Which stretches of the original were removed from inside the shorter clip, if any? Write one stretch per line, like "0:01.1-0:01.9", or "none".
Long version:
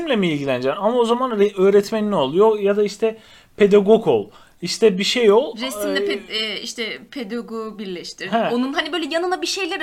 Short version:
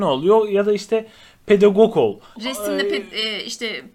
0:04.5-0:05.5